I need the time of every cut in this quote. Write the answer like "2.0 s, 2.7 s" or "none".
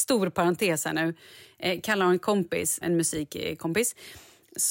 2.8 s